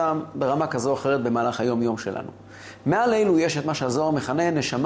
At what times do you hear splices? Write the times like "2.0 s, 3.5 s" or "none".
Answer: none